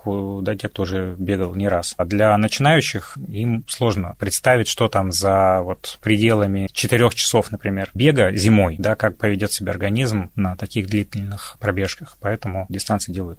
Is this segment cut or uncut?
uncut